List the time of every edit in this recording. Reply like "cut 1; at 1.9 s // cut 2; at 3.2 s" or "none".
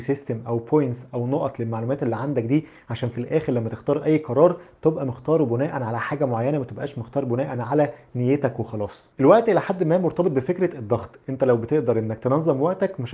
cut 1; at 9.1 s